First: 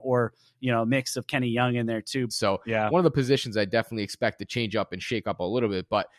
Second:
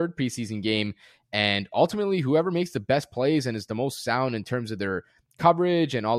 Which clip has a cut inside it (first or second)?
first